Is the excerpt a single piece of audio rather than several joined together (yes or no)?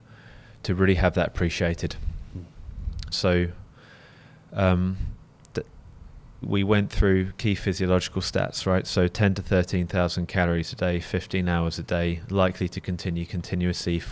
no